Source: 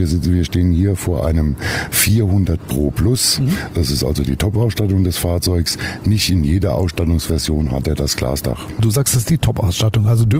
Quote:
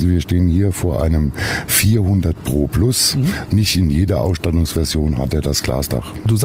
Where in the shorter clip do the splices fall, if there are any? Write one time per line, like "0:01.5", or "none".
0:03.5